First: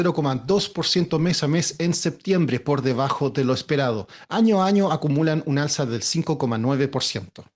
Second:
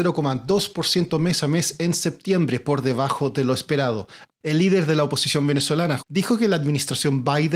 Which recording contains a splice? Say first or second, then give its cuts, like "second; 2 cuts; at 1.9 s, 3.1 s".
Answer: second; 2 cuts; at 4.3 s, 6.0 s